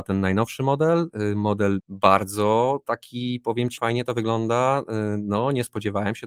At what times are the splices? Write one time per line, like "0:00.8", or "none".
0:01.8
0:03.8